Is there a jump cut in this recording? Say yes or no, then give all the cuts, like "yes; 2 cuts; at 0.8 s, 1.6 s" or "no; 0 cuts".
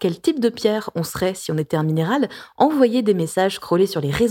no; 0 cuts